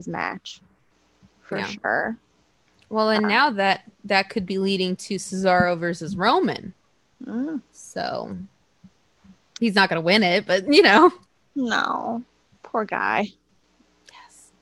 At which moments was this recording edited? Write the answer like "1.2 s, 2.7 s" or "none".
none